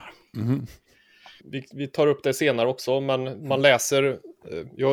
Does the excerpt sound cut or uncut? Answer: cut